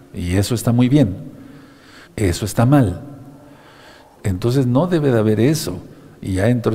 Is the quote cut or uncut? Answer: cut